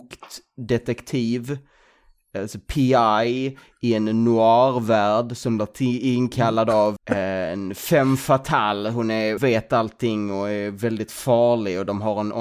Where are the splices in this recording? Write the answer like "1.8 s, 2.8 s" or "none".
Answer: 7.0 s, 9.4 s

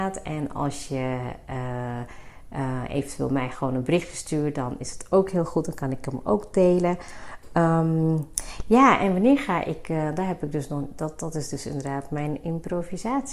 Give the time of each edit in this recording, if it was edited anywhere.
none

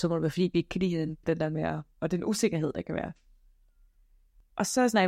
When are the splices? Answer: 1.2 s

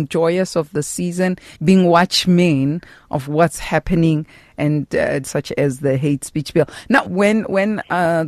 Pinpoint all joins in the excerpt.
1.5 s, 5.2 s, 7.1 s

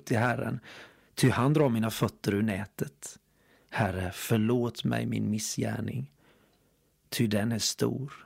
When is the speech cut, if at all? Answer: 3.6 s

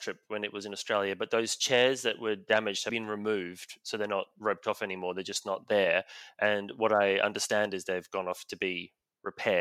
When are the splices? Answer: 2.9 s

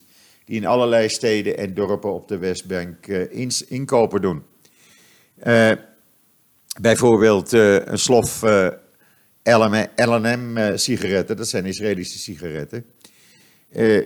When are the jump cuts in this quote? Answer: none

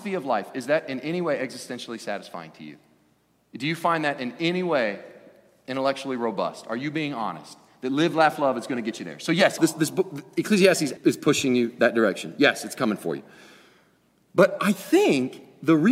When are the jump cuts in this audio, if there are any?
9.6 s, 11.0 s

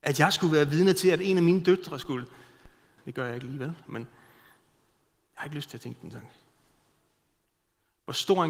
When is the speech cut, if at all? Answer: 3.0 s

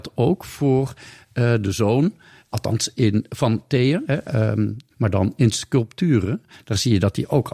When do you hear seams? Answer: 4.9 s

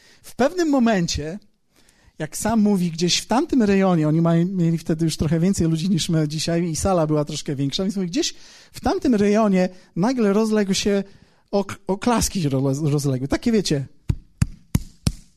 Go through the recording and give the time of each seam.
none

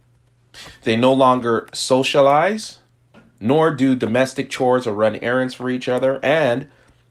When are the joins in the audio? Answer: none

